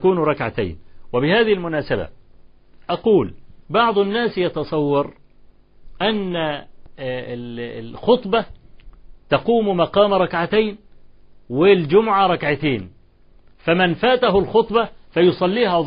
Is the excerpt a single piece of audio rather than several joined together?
no; 1 cut; at 3.6 s

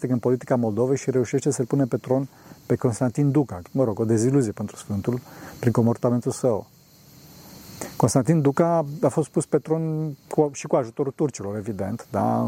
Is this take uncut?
no; 1 cut; at 3.6 s

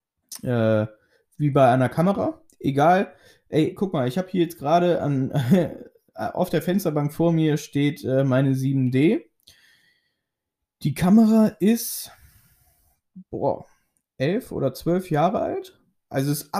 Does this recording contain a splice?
no; 0 cuts

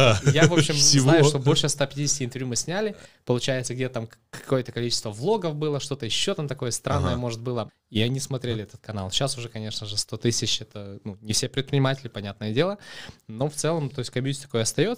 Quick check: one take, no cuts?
no; 1 cut; at 7.7 s

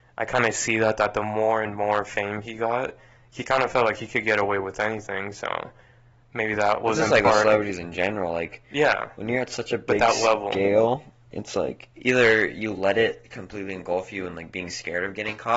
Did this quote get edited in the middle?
no; 0 cuts

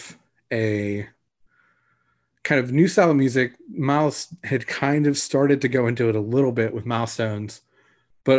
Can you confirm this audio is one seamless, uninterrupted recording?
yes; 0 cuts

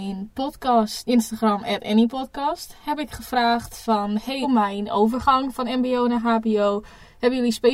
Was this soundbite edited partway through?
yes; 1 cut; at 4.4 s

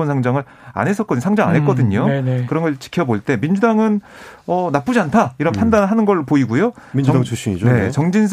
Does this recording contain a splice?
yes; 1 cut; at 6.9 s

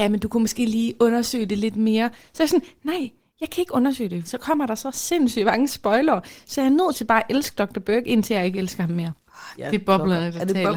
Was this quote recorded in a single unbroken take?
no; 2 cuts; at 4.2 s, 9.6 s

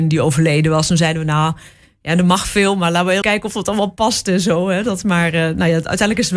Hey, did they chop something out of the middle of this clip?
yes; 1 cut; at 3.2 s

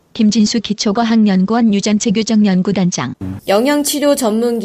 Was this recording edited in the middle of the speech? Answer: yes; 1 cut; at 3.4 s

